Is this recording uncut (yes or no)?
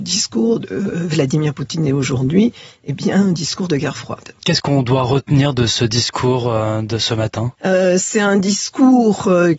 yes